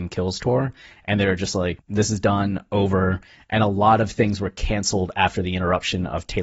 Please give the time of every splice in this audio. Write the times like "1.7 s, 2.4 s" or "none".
1.8 s